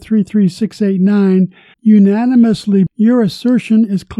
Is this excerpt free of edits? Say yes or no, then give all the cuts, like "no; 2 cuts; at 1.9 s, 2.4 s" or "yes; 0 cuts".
no; 2 cuts; at 1.7 s, 2.9 s